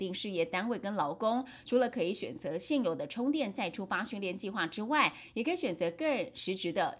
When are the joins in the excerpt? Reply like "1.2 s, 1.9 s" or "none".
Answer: none